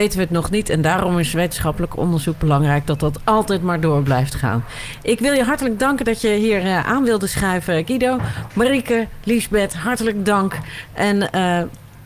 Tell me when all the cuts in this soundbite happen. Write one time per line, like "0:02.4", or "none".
none